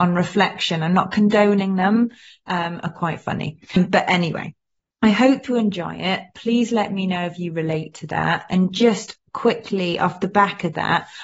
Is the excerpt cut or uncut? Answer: uncut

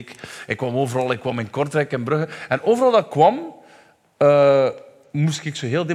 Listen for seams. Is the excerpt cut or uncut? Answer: uncut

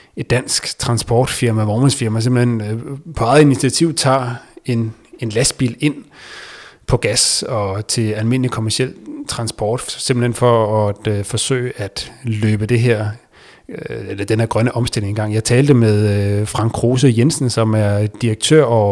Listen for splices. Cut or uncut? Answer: uncut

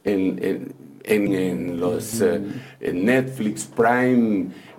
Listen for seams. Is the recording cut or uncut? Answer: cut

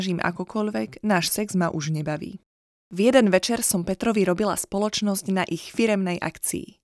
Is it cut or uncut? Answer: uncut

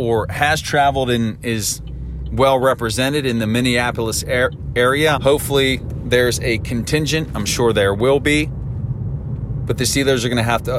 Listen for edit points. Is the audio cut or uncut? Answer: cut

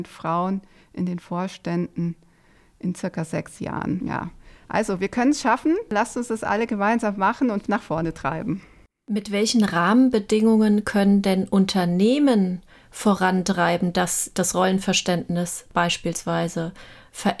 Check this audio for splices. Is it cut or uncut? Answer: uncut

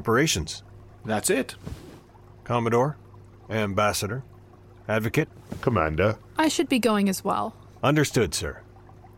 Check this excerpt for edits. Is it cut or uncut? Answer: cut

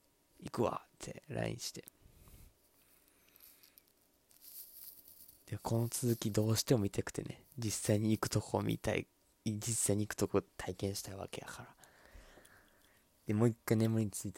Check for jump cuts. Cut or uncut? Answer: uncut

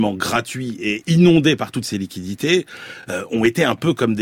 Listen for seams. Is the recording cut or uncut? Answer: uncut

